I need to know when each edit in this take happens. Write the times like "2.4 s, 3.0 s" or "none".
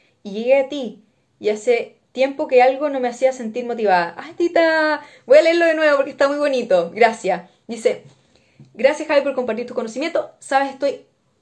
4.4 s